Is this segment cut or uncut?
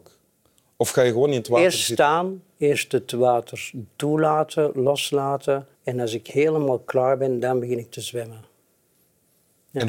cut